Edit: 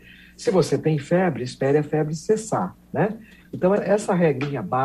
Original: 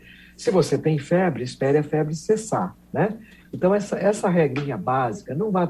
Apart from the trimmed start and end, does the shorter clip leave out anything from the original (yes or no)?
yes